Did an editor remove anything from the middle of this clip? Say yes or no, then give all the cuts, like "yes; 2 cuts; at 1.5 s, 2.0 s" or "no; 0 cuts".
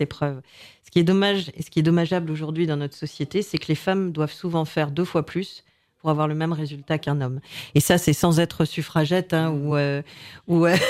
no; 0 cuts